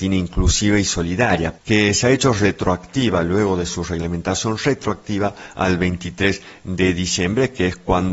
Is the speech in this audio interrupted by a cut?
yes; 1 cut; at 1.6 s

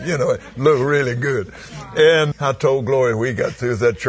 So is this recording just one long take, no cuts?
no; 1 cut; at 2.3 s

